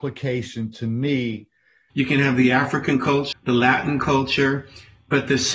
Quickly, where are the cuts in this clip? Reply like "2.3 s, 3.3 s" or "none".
1.9 s, 3.3 s